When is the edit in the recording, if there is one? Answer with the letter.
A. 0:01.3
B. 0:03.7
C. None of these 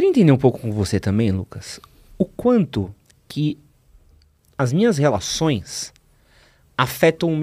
C